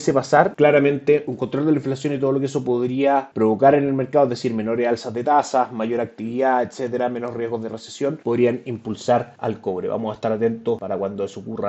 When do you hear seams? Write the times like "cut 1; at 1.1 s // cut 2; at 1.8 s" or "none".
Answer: none